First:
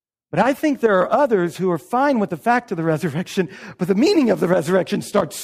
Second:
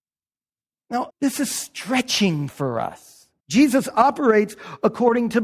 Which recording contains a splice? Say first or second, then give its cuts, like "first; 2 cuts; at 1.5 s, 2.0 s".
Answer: second; 2 cuts; at 1.1 s, 3.4 s